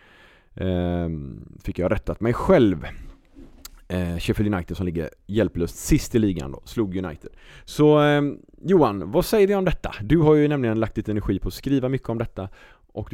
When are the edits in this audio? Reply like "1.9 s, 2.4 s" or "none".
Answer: none